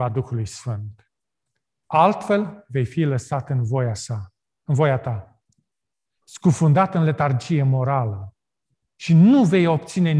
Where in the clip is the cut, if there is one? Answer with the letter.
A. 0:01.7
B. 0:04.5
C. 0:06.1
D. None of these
D